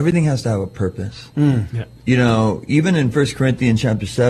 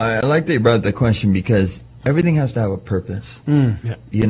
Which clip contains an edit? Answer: first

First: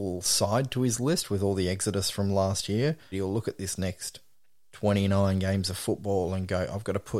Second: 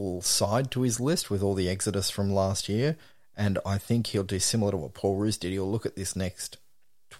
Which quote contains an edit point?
first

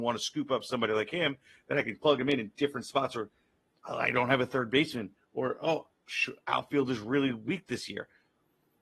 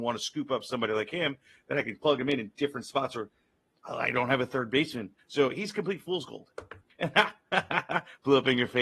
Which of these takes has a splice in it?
second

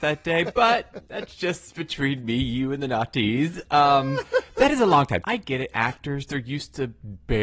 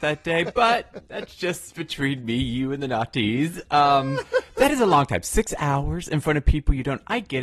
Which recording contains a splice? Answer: first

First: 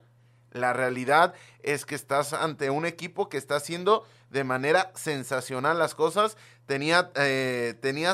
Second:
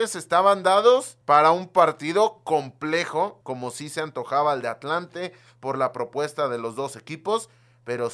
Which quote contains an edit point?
second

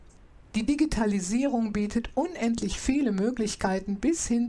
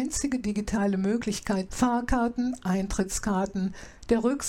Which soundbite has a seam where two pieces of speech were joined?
second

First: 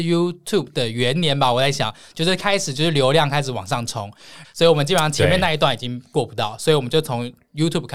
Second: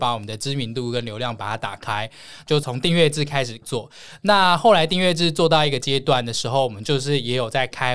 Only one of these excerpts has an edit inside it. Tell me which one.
first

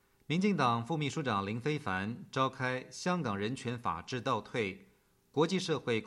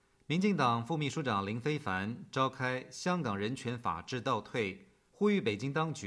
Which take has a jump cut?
second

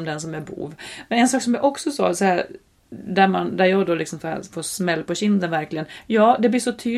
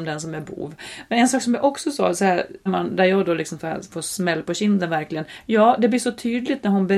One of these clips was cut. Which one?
second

